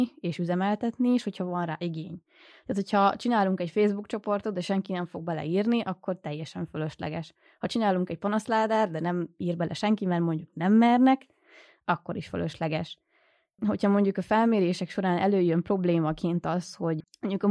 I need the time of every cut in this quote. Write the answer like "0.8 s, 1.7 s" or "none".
none